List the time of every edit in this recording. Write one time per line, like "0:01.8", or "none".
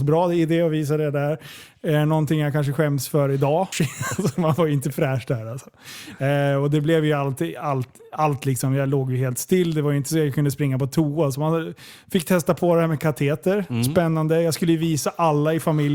0:03.7

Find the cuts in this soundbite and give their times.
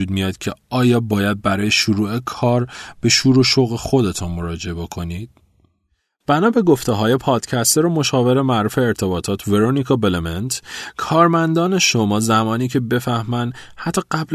none

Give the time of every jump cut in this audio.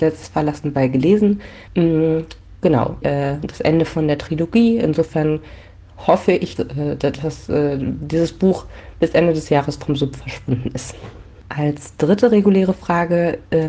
0:01.7
0:03.0
0:06.6

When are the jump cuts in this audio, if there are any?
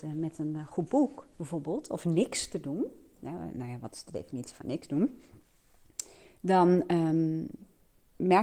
0:01.3

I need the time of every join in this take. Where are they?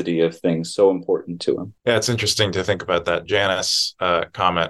none

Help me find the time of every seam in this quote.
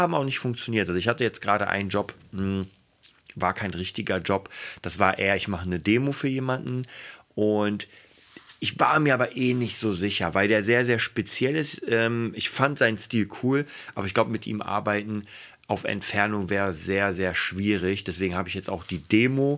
none

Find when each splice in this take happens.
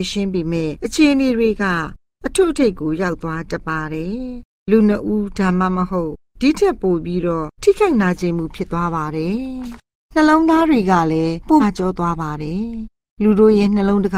0:11.6

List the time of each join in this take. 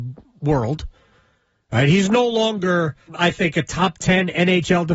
0:03.1

